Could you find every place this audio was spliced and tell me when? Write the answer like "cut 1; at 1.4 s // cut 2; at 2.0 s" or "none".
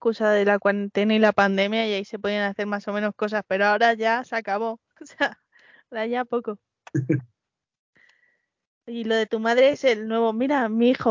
cut 1; at 4.9 s